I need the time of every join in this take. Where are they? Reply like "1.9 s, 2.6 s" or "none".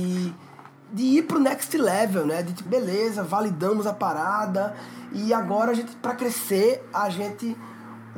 2.7 s